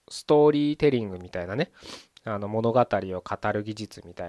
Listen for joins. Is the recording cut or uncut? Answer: uncut